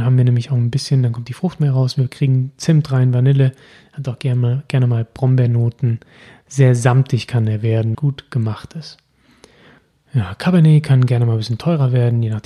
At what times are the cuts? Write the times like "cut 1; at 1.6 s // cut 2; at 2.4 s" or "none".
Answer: cut 1; at 7.9 s